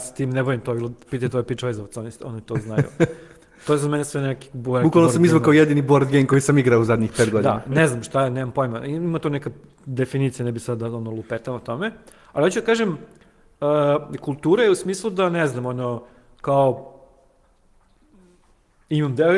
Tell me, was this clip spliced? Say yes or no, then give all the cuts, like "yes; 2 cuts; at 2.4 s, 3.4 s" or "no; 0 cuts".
no; 0 cuts